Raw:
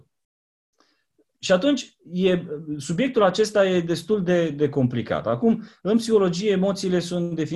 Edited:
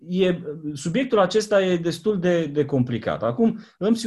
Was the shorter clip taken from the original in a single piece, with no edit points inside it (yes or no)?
yes